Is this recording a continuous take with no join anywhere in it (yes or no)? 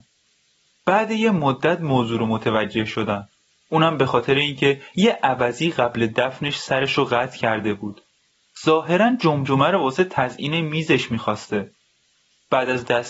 yes